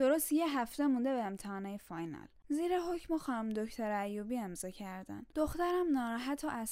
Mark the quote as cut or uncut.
cut